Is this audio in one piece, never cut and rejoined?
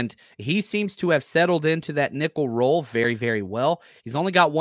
yes; 0 cuts

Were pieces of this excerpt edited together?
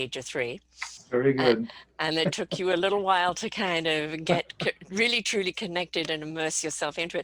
no; 0 cuts

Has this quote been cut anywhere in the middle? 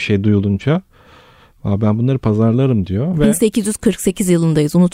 no; 0 cuts

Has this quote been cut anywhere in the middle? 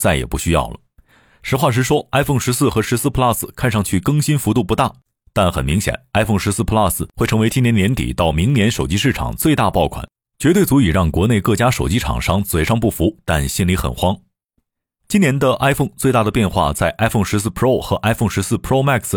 no; 0 cuts

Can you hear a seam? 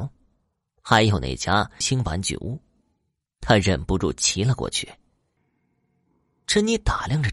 yes; 2 cuts; at 1.8 s, 5.4 s

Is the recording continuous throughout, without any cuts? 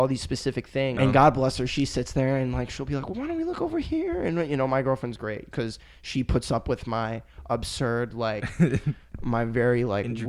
no; 2 cuts; at 1.0 s, 5.5 s

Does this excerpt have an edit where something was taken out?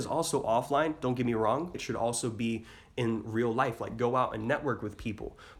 yes; 1 cut; at 1.7 s

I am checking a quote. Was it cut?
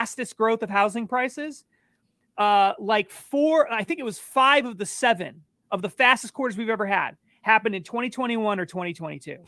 no; 0 cuts

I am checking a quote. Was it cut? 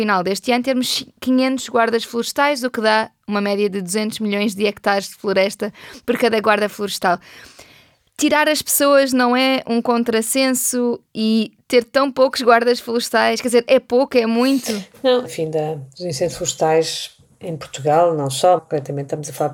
yes; 2 cuts; at 15.2 s, 18.6 s

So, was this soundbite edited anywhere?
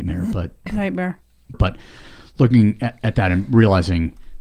yes; 1 cut; at 1.5 s

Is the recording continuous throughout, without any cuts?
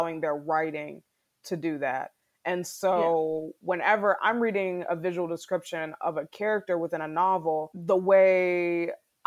yes; 0 cuts

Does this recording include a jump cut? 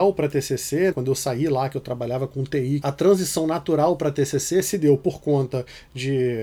yes; 2 cuts; at 0.9 s, 2.8 s

